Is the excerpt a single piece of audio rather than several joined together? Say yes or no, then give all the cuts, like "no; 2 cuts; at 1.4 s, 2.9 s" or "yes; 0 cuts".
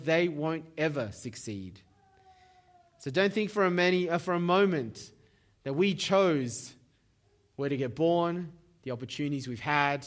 yes; 0 cuts